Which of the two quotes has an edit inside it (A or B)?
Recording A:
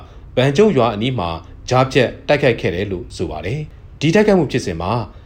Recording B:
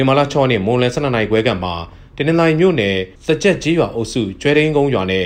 B